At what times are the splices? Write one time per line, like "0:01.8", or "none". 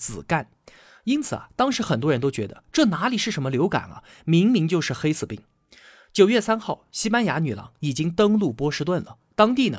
none